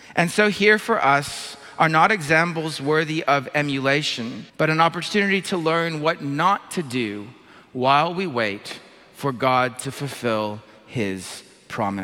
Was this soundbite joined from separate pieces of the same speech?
yes; 1 cut; at 4.5 s

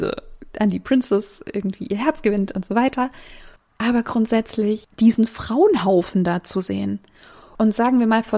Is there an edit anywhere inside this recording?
yes; 1 cut; at 4.9 s

